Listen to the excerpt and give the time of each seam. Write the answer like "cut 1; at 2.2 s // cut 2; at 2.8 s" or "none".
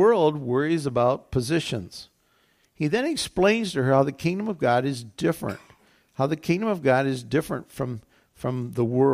cut 1; at 2.6 s